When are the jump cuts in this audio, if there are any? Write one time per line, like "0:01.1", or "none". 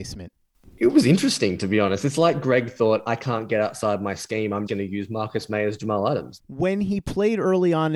0:04.7
0:06.4